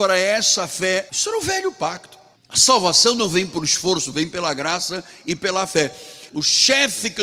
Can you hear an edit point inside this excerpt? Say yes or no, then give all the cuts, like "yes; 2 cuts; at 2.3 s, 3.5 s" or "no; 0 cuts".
yes; 3 cuts; at 1.1 s, 2.3 s, 6.3 s